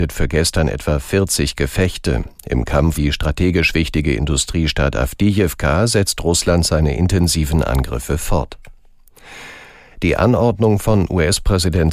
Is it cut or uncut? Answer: cut